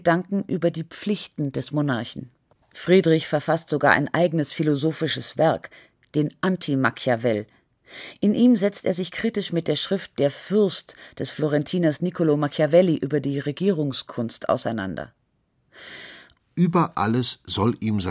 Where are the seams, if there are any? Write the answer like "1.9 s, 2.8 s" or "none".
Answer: 2.6 s, 16.4 s